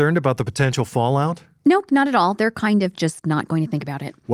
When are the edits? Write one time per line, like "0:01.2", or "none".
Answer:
none